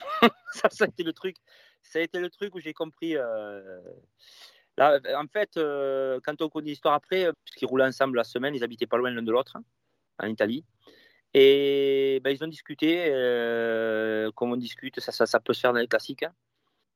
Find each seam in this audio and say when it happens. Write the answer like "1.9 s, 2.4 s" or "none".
7.3 s